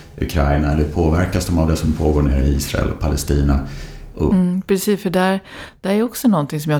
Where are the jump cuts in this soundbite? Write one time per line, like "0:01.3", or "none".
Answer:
0:04.3